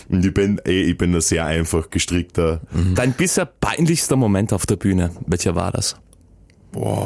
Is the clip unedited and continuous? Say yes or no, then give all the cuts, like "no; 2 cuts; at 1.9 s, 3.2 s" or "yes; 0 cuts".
no; 1 cut; at 3.0 s